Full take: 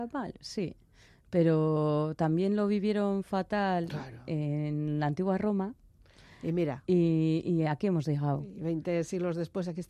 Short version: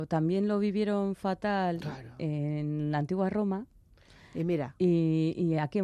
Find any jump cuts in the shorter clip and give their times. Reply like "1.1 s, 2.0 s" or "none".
none